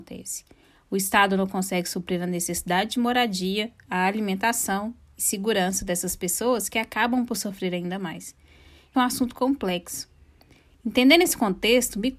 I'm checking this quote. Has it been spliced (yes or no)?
yes